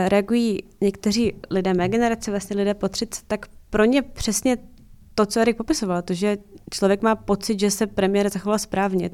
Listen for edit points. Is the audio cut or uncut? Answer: cut